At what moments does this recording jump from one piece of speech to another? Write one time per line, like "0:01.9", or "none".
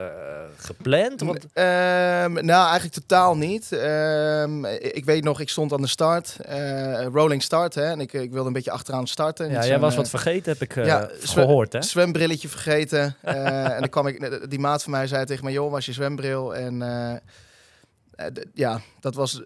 none